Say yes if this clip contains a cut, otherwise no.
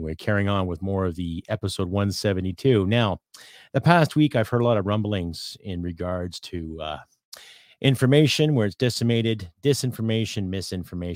no